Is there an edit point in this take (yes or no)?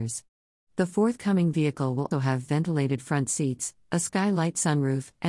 yes